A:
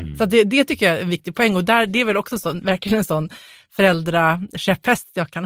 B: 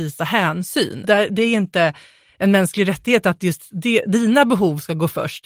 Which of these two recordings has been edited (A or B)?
B